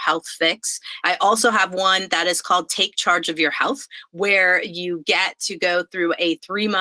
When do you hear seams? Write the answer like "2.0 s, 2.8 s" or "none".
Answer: 1.0 s